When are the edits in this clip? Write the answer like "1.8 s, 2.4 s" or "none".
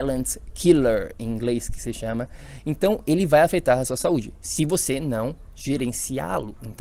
none